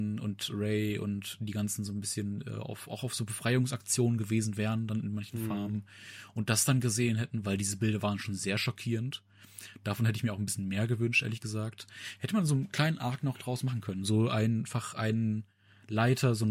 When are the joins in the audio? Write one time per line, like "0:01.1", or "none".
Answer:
none